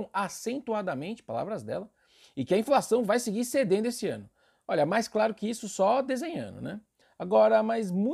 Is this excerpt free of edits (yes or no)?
yes